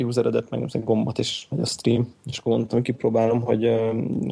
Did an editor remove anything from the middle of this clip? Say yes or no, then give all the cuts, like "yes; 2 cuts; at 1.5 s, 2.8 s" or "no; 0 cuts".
no; 0 cuts